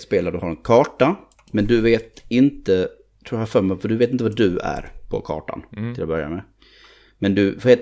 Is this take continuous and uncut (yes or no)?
yes